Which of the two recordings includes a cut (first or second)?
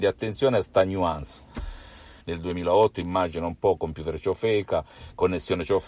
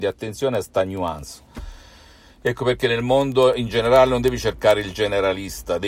first